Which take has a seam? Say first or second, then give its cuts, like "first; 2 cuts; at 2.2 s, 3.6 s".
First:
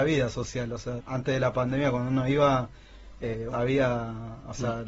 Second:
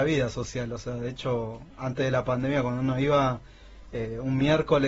first; 2 cuts; at 1.0 s, 3.5 s